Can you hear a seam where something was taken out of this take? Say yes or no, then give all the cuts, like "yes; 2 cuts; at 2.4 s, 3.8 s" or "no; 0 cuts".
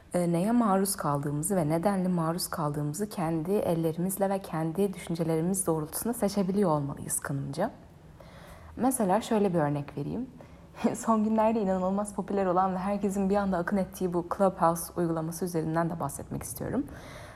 no; 0 cuts